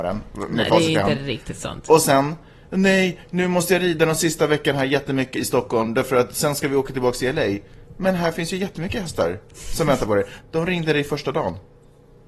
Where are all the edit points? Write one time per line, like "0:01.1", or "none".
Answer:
0:05.4
0:10.4